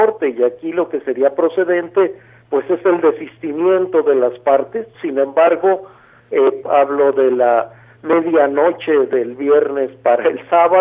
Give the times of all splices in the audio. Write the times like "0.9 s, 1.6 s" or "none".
4.9 s, 6.6 s